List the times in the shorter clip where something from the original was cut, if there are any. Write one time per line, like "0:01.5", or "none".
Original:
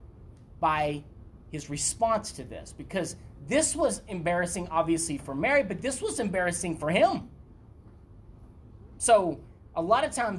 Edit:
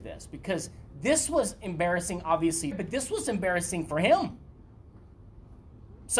0:02.7